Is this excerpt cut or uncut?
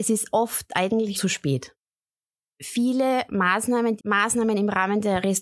cut